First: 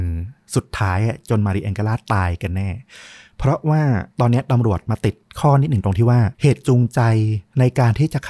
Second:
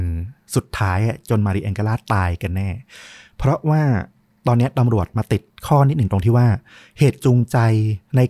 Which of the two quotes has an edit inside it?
first; 2 cuts; at 4.1 s, 6.3 s

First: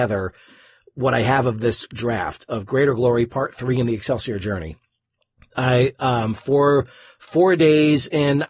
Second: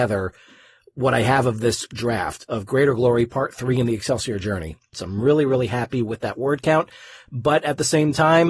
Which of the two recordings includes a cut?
second; 1 cut; at 4.9 s

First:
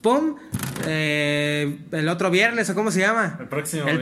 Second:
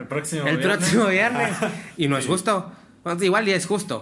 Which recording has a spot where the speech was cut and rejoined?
second; 1 cut; at 1.9 s

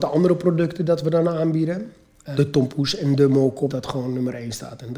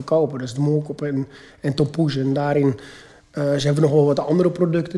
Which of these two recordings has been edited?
first; 2 cuts; at 2.3 s, 3.7 s

